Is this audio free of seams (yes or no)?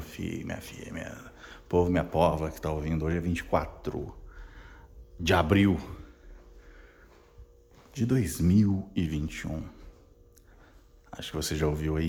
yes